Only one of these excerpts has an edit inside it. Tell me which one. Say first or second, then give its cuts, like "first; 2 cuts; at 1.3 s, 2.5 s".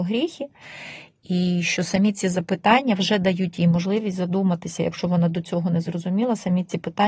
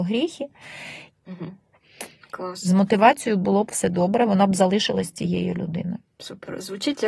second; 1 cut; at 1.1 s